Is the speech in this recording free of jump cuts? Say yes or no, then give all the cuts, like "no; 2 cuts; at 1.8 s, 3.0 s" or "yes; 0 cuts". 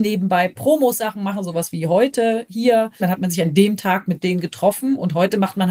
no; 2 cuts; at 3.0 s, 4.2 s